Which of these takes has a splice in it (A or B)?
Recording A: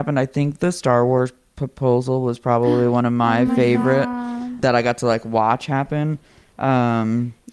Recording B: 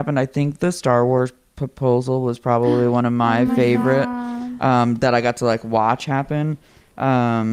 A